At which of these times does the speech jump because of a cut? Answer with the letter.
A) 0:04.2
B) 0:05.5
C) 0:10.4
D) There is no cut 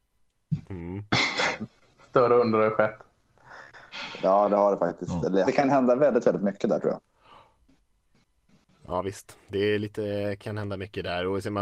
B